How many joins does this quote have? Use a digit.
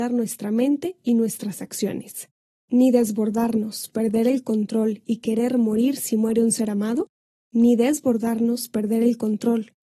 0